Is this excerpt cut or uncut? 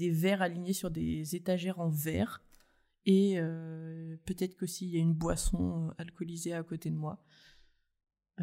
uncut